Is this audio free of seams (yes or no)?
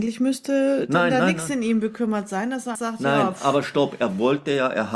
no